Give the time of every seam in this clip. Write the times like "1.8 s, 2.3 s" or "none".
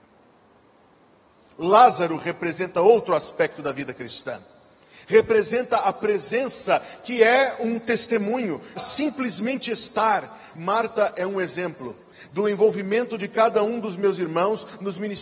8.8 s, 10.5 s